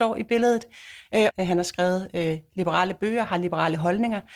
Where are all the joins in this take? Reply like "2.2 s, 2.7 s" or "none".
1.3 s